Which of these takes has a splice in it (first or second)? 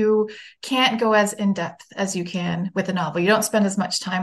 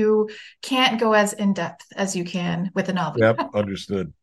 second